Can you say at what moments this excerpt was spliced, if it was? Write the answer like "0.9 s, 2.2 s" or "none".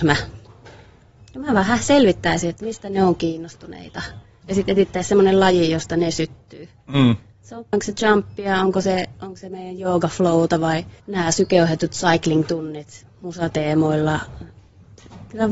7.7 s, 11.0 s